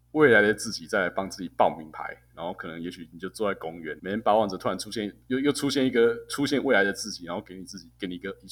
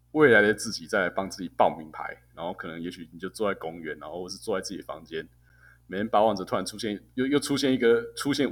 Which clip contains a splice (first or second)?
first